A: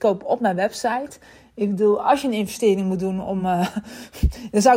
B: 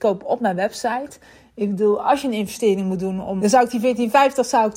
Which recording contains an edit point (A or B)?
B